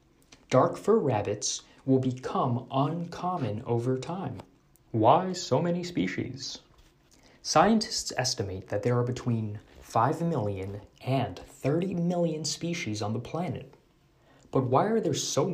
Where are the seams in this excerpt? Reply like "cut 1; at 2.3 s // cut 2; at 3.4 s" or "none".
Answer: cut 1; at 4.8 s